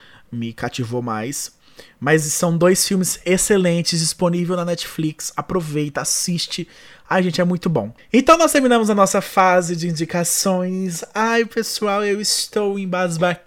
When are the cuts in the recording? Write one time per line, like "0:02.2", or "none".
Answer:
none